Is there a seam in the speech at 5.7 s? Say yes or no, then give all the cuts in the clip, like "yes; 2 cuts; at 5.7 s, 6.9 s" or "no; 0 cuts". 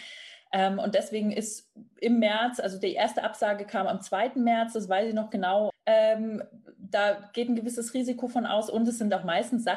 yes; 1 cut; at 5.7 s